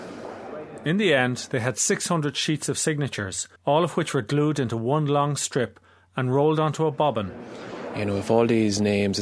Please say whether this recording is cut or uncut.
cut